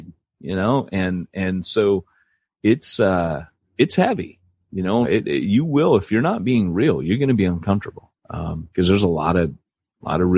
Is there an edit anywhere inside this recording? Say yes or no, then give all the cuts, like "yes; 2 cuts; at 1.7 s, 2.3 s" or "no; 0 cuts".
yes; 2 cuts; at 5.0 s, 8.2 s